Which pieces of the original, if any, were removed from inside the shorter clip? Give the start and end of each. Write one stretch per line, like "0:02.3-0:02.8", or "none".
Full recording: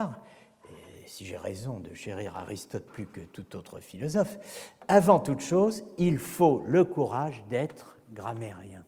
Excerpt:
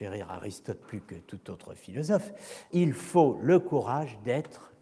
0:04.8-0:06.0

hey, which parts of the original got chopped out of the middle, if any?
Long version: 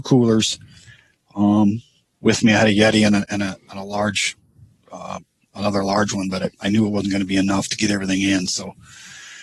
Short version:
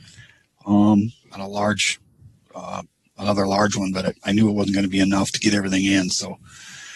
0:01.9-0:03.6

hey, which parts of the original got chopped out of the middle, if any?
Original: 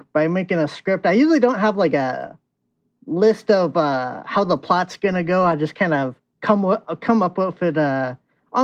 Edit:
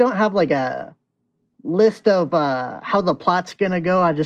none

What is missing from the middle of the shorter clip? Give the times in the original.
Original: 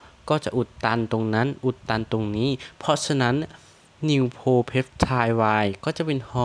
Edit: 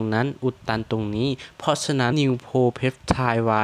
0:03.3-0:04.0

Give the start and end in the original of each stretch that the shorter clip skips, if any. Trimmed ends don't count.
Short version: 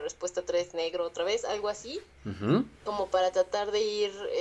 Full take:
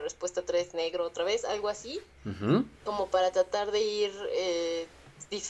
none

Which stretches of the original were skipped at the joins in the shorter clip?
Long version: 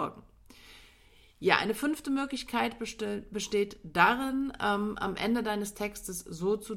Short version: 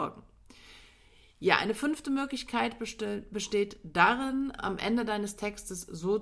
0:04.6-0:05.0

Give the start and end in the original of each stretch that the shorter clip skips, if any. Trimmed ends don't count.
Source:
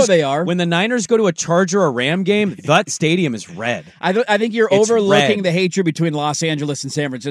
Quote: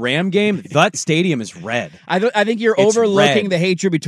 none

